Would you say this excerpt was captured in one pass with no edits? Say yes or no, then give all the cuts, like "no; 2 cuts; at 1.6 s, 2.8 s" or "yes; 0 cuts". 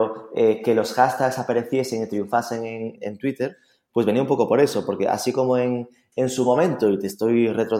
no; 2 cuts; at 3.0 s, 6.1 s